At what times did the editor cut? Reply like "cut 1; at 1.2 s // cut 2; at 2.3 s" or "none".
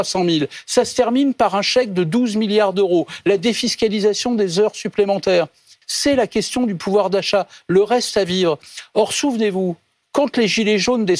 cut 1; at 5.8 s